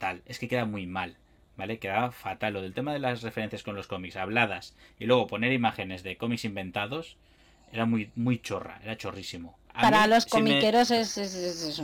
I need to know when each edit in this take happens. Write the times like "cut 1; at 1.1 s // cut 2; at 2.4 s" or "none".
cut 1; at 9.7 s